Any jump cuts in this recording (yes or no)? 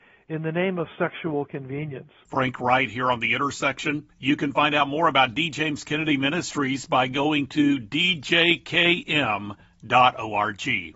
no